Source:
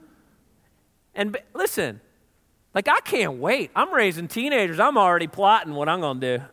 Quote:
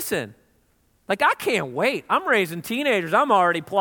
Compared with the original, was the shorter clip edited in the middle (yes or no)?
no